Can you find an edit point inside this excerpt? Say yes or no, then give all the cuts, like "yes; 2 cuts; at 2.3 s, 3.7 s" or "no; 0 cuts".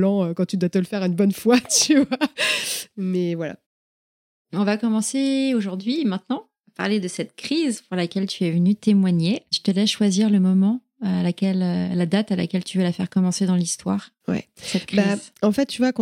yes; 1 cut; at 9.5 s